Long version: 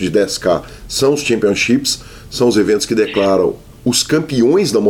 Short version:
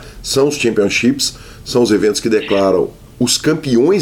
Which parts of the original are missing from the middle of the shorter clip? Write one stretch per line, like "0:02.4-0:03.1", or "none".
none